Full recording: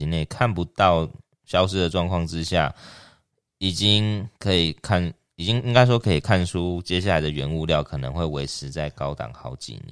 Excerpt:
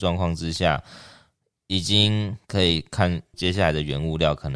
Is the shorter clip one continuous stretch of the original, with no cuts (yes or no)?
no